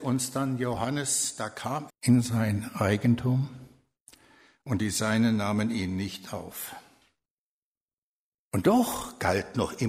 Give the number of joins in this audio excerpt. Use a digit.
1